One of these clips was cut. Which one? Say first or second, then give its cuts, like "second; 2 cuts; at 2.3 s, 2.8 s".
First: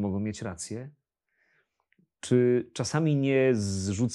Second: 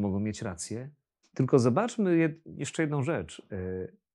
second; 1 cut; at 1.2 s